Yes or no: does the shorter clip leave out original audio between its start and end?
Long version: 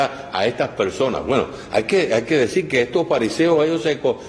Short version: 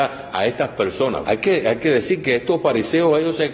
yes